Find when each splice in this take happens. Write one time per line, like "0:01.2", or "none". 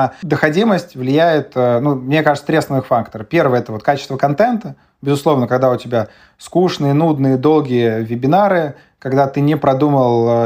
none